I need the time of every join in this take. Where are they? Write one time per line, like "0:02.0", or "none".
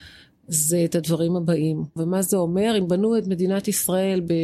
0:02.0